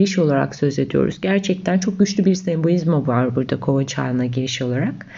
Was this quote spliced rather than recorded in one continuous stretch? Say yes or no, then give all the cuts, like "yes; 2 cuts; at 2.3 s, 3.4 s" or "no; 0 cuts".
no; 0 cuts